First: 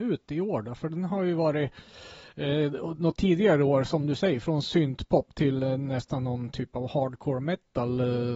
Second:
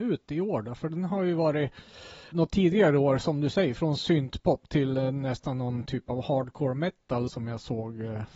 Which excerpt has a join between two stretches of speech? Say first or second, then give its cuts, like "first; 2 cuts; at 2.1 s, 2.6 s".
second; 2 cuts; at 2.3 s, 7.3 s